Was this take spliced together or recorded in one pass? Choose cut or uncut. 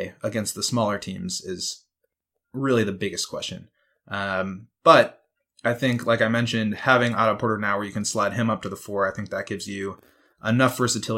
uncut